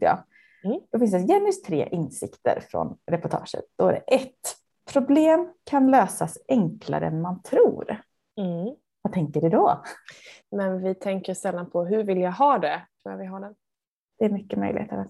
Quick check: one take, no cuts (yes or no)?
no